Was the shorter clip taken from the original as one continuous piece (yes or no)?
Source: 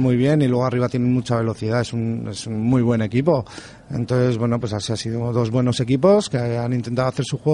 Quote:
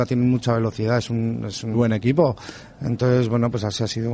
no